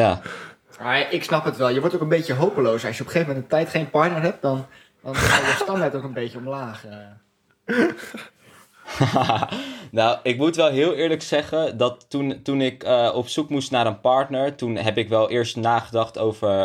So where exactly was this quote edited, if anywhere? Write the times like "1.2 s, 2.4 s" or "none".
none